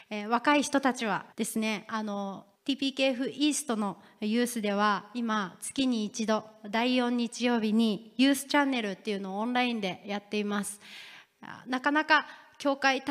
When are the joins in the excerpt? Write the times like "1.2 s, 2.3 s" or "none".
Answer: 1.3 s, 2.5 s